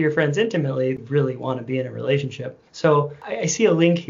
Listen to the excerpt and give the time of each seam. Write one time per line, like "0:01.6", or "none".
0:01.0
0:02.7